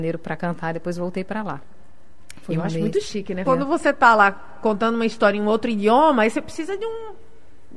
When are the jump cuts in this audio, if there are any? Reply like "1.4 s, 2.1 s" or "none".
3.4 s